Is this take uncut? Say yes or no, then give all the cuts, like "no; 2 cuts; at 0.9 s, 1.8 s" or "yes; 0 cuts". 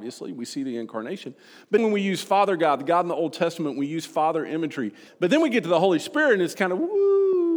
no; 3 cuts; at 1.8 s, 5.1 s, 6.5 s